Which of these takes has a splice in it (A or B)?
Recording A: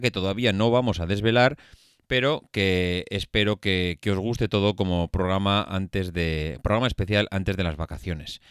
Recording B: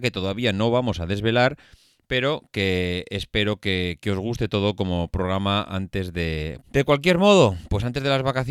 B